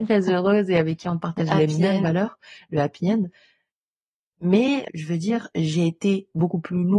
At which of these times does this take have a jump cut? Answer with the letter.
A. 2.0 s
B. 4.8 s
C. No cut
B